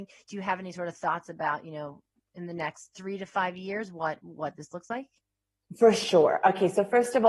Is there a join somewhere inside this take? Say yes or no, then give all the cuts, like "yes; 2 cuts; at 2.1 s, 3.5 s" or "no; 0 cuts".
no; 0 cuts